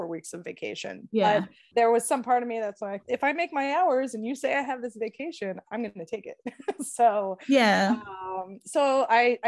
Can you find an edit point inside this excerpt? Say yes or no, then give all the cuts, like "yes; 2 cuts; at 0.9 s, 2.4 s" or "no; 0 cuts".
yes; 1 cut; at 3.0 s